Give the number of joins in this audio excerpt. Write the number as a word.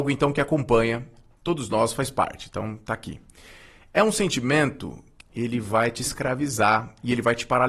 one